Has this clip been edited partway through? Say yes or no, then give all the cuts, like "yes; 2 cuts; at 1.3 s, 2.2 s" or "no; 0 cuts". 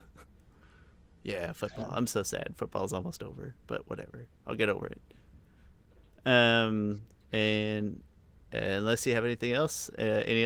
yes; 1 cut; at 7.1 s